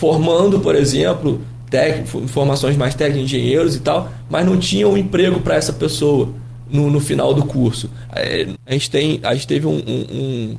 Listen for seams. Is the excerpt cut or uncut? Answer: cut